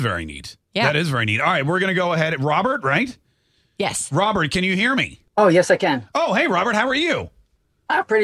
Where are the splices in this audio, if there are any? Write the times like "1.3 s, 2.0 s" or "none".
5.3 s